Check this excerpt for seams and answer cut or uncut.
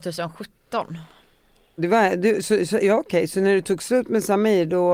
cut